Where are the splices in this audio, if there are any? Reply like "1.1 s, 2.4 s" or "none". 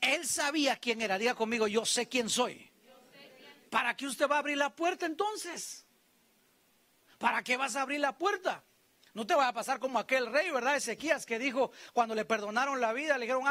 3.7 s